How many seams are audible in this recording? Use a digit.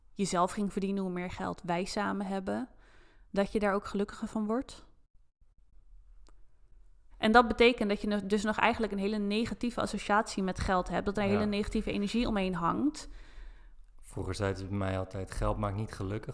1